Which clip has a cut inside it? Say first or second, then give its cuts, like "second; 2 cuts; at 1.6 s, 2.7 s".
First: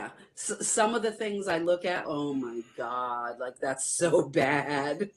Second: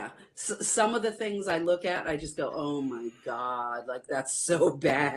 first; 1 cut; at 2.0 s